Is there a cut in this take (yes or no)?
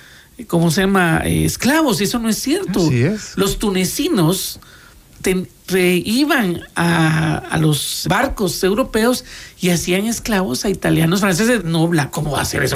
yes